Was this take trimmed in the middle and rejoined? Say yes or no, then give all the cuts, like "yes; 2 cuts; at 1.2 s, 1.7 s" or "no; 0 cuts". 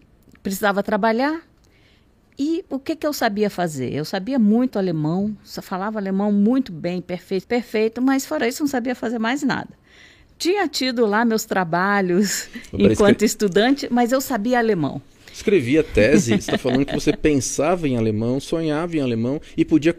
yes; 1 cut; at 7.4 s